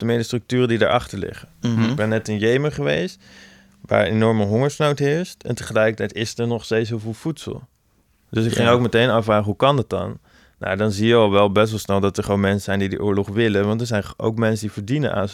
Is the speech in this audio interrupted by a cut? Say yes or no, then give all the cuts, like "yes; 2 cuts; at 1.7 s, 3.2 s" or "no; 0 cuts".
no; 0 cuts